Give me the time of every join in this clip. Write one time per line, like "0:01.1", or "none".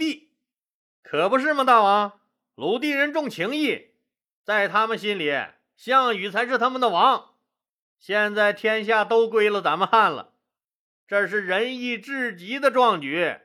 0:07.8
0:10.9